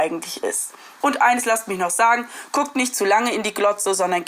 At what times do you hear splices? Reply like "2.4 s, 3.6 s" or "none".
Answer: 1.0 s